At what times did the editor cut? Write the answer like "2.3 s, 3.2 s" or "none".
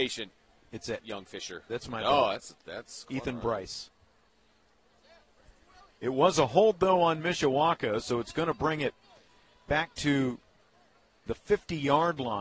1.7 s